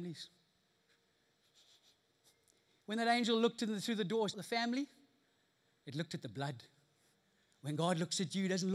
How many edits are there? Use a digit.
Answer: 1